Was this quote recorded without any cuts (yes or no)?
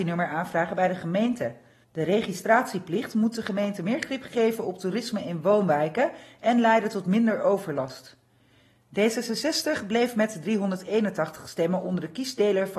no